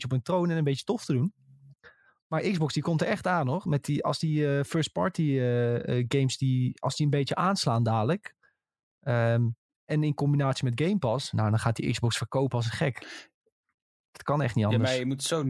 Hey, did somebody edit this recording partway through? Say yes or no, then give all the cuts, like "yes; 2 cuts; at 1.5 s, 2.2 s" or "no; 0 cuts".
no; 0 cuts